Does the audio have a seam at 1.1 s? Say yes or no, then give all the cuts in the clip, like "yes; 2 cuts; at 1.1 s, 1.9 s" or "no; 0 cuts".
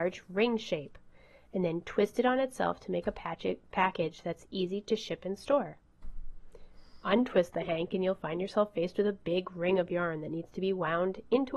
no; 0 cuts